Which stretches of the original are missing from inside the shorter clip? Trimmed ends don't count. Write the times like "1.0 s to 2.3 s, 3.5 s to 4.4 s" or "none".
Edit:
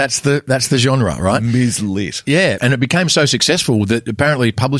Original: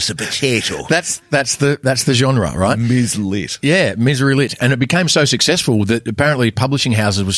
3.9 s to 4.6 s